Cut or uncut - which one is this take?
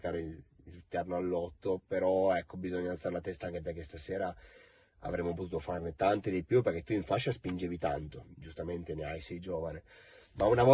uncut